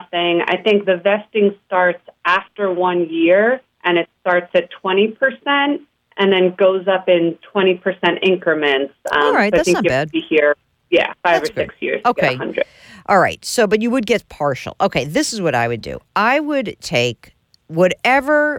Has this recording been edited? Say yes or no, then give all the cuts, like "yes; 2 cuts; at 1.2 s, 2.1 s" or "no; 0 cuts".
no; 0 cuts